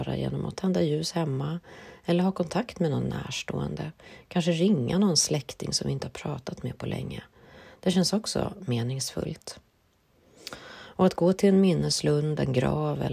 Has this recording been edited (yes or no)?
no